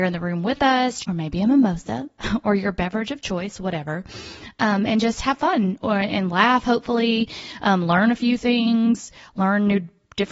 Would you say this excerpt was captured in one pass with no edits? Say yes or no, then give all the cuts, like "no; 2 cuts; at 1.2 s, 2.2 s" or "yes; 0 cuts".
no; 1 cut; at 1.0 s